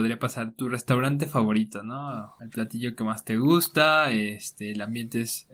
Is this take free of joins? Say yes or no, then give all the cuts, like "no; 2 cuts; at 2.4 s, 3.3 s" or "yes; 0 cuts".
yes; 0 cuts